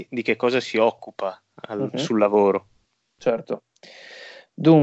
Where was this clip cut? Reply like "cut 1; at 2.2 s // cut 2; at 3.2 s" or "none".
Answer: none